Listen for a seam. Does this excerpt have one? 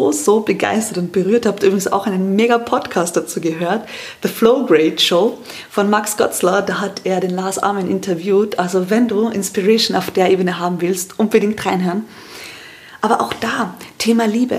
no; 0 cuts

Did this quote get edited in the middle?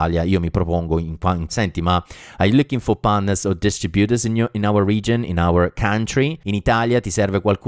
yes; 1 cut; at 1.5 s

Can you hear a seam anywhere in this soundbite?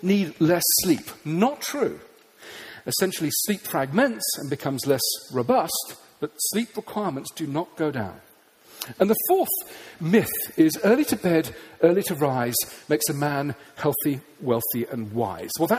yes; 1 cut; at 2.8 s

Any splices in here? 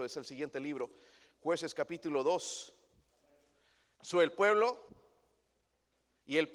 yes; 1 cut; at 4.0 s

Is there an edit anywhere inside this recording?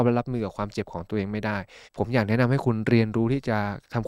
yes; 1 cut; at 1.9 s

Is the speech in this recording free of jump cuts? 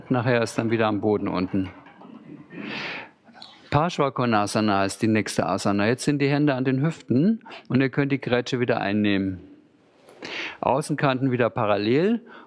yes; 0 cuts

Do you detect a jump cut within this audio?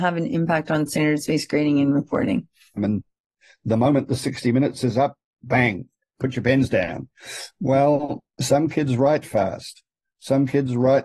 yes; 2 cuts; at 2.8 s, 8.3 s

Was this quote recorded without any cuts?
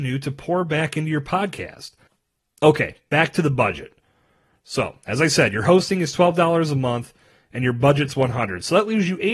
yes; 0 cuts

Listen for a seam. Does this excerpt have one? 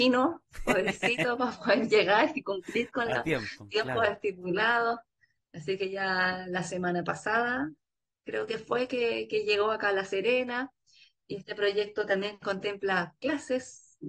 no; 0 cuts

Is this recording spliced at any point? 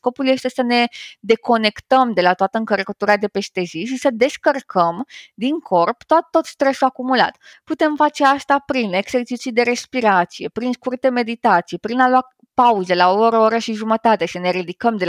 yes; 1 cut; at 7.5 s

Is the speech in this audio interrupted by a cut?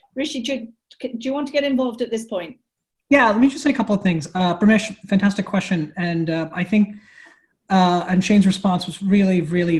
no; 0 cuts

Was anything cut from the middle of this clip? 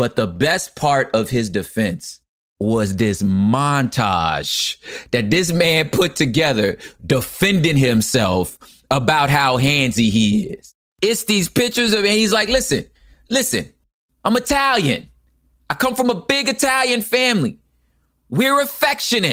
no; 0 cuts

